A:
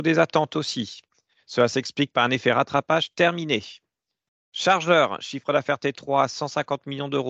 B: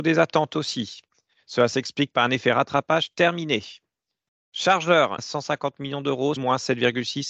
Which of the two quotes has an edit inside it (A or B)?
B